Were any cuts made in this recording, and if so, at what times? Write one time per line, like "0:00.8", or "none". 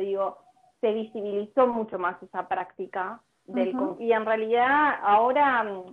0:03.9